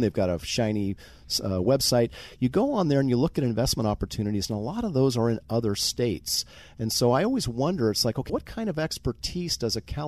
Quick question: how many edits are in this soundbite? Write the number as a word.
one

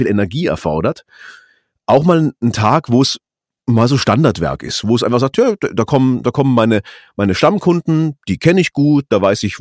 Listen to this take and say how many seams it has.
zero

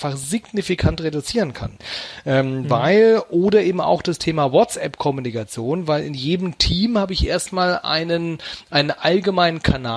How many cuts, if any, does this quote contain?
zero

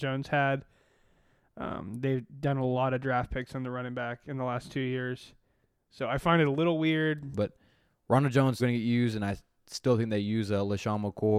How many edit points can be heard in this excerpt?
two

